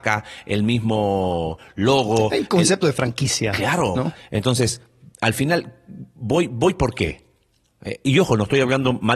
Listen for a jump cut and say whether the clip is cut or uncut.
cut